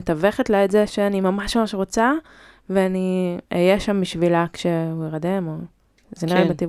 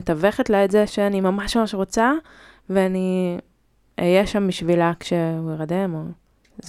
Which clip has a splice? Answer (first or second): first